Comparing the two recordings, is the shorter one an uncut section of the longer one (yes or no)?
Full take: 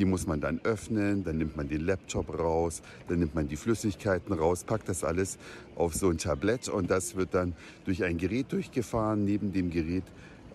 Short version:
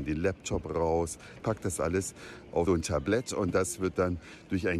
no